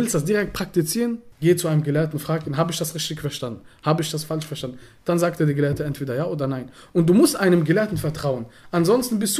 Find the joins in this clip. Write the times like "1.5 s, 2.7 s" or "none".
1.3 s